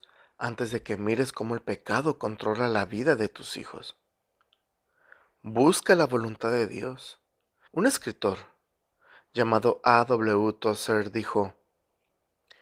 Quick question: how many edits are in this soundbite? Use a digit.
1